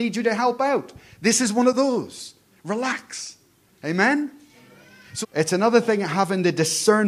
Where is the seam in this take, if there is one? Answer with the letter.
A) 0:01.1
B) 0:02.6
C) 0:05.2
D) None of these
C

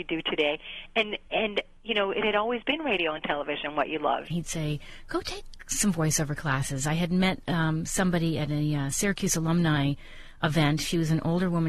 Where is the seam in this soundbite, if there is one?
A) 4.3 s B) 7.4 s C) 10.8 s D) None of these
A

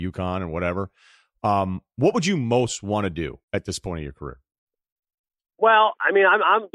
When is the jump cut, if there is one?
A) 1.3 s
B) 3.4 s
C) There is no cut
B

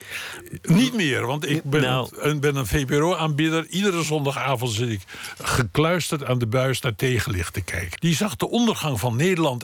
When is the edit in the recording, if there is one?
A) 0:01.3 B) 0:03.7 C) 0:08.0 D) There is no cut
C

